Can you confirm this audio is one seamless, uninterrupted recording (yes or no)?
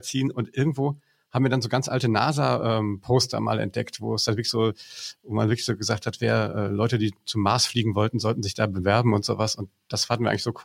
yes